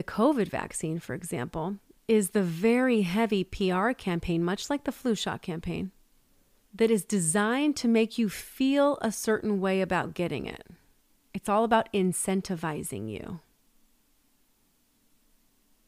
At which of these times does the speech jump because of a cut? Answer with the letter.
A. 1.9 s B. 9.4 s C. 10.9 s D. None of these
A